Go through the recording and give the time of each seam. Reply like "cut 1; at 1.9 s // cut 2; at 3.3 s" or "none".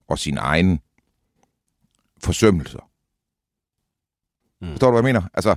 cut 1; at 4.4 s